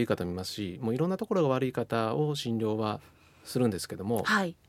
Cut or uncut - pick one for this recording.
uncut